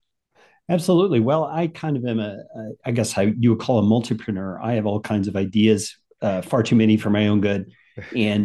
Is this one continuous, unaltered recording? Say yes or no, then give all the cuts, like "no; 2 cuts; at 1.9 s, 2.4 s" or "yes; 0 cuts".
yes; 0 cuts